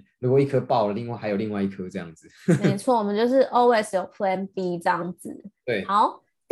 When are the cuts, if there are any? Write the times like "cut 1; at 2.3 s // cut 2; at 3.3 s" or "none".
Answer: none